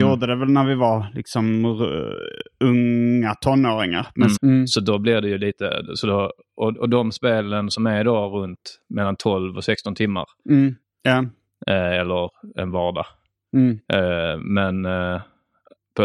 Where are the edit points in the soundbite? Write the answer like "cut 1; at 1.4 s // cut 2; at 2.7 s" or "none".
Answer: cut 1; at 4.4 s // cut 2; at 10.8 s